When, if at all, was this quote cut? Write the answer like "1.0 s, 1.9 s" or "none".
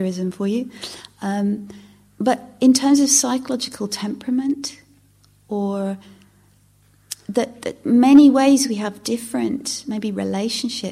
none